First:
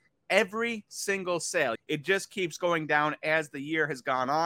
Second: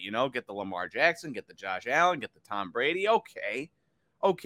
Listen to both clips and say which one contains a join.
first; 1 cut; at 1.8 s

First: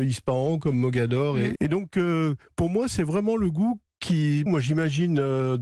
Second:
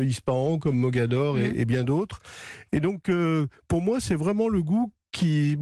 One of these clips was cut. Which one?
first; 2 cuts; at 1.5 s, 4.5 s

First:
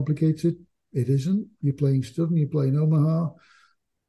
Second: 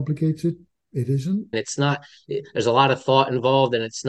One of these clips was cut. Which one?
second; 1 cut; at 1.5 s

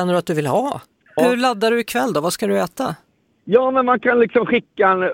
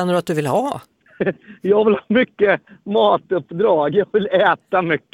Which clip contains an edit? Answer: first; 2 cuts; at 1.2 s, 3.3 s

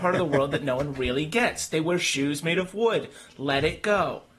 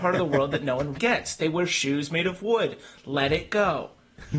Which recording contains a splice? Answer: second; 1 cut; at 1.0 s

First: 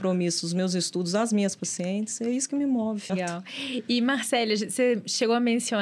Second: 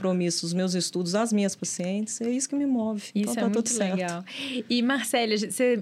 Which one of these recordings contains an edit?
first; 1 cut; at 3.1 s

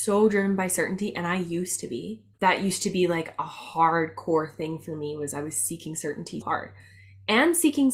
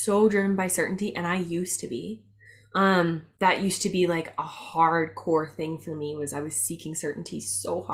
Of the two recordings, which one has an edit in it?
first; 2 cuts; at 2.3 s, 6.4 s

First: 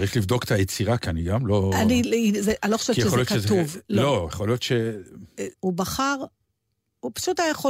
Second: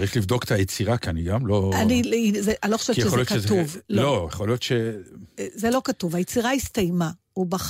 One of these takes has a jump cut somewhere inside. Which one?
first; 1 cut; at 5.5 s

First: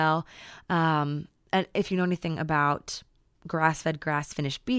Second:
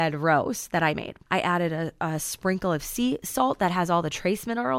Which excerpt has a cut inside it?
second; 1 cut; at 1.3 s

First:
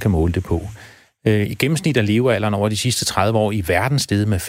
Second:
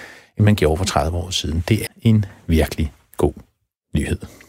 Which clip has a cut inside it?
second; 1 cut; at 1.9 s

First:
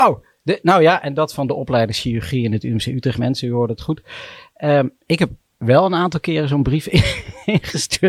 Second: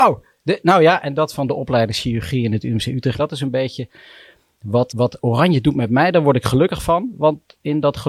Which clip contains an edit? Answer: second; 2 cuts; at 3.2 s, 4.9 s

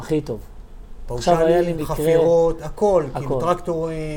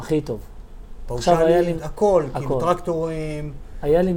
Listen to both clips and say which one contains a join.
second; 1 cut; at 1.8 s

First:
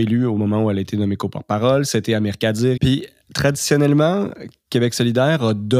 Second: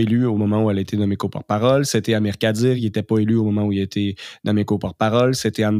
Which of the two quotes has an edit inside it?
first; 1 cut; at 2.8 s

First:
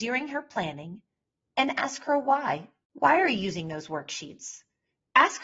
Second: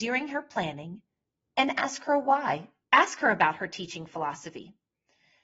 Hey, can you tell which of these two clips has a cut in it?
second; 1 cut; at 2.8 s

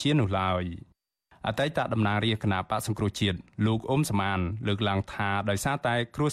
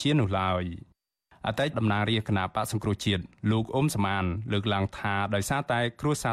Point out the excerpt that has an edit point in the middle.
second; 1 cut; at 1.7 s

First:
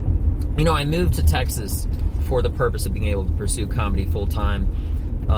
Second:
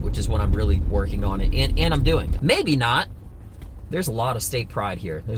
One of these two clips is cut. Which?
second; 2 cuts; at 2.4 s, 3.9 s

